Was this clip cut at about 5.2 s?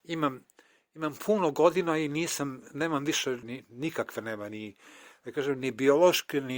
no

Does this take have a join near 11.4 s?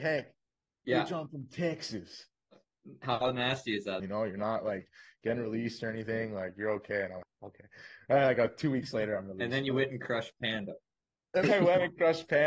yes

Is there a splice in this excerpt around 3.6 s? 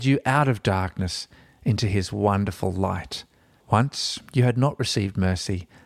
yes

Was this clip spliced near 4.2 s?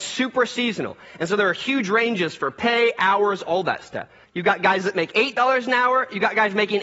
yes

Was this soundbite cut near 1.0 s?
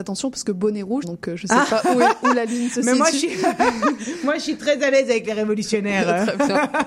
yes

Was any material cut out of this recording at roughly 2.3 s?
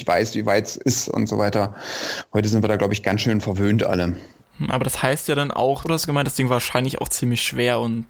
no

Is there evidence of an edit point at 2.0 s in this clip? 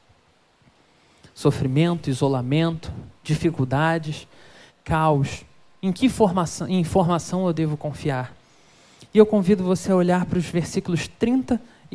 no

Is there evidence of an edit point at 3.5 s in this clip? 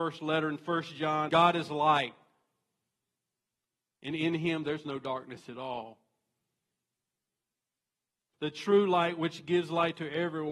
no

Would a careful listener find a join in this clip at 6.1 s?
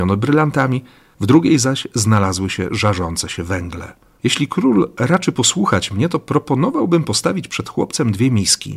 no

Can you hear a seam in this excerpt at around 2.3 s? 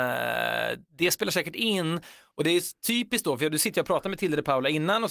no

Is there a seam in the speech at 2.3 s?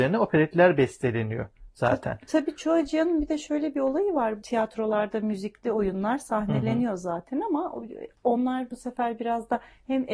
no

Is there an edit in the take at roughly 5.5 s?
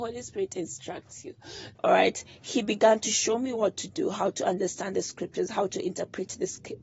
no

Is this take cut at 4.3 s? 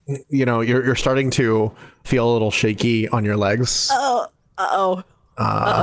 no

